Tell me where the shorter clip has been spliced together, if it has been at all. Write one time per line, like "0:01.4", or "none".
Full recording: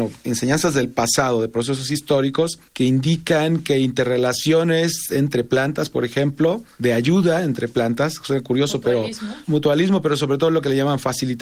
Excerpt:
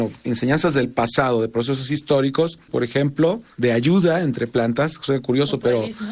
0:02.7